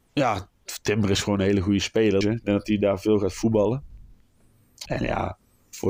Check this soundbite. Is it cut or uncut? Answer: cut